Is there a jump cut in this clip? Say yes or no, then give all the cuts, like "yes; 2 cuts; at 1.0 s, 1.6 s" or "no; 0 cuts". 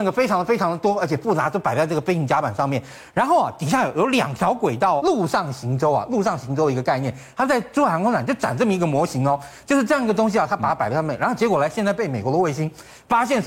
yes; 1 cut; at 5.0 s